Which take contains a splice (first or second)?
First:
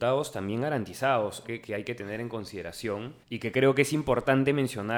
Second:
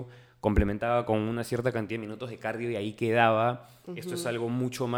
first